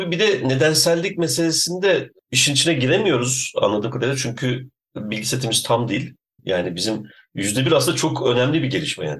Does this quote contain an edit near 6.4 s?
yes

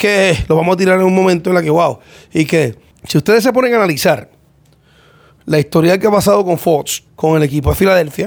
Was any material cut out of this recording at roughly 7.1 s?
yes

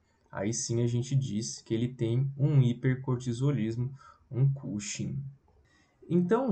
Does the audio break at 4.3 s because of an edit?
no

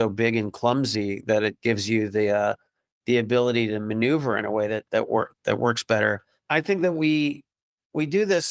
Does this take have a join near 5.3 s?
yes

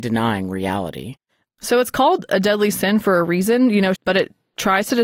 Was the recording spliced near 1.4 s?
no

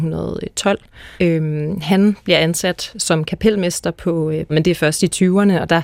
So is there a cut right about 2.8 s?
no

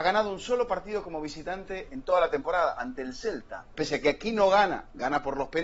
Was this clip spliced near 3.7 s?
yes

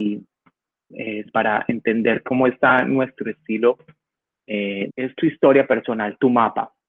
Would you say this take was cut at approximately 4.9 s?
yes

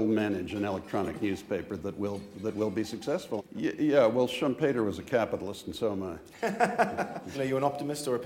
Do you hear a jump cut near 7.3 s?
yes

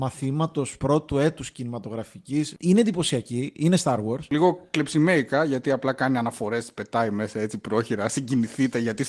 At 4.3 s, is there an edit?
no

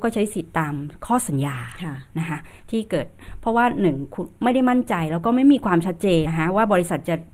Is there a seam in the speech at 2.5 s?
no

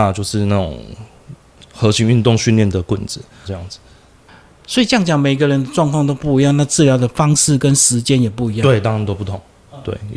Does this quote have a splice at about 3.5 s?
yes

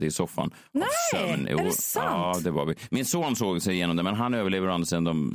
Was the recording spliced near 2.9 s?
no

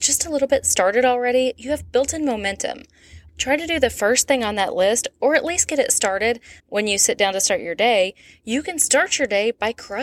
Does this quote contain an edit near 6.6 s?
yes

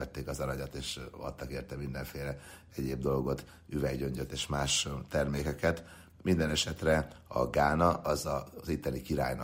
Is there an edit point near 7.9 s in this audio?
no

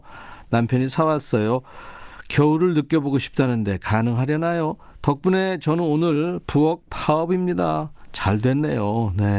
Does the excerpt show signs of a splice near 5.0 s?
no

